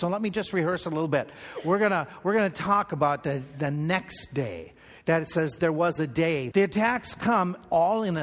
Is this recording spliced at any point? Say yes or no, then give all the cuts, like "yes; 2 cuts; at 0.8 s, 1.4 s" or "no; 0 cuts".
yes; 1 cut; at 6.5 s